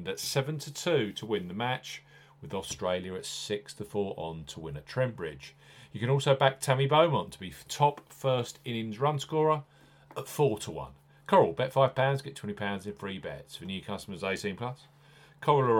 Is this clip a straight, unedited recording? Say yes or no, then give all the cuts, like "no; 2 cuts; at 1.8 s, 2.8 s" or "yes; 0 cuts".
yes; 0 cuts